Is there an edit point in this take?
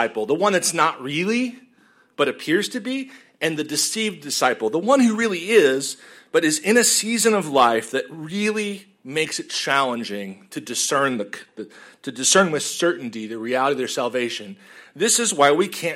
no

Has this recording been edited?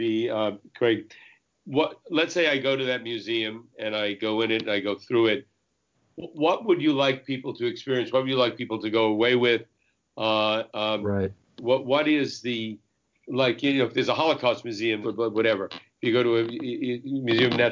yes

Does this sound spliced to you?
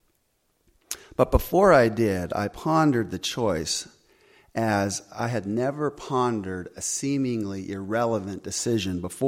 no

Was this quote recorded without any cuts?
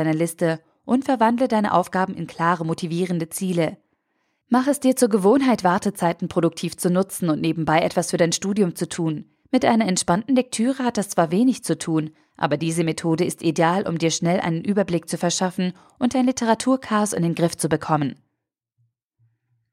no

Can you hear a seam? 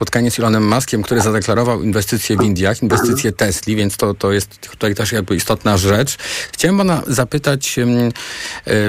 no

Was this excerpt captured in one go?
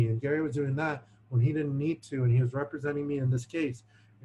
yes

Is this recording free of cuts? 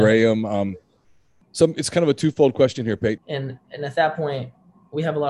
no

